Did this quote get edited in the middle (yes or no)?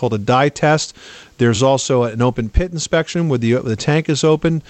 no